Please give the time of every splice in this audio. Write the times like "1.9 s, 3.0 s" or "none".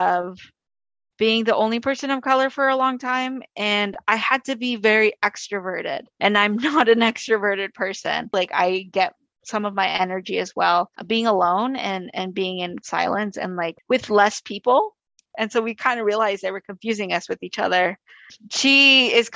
15.3 s